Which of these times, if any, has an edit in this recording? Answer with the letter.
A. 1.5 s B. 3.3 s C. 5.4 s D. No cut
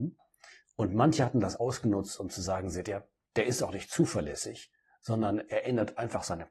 B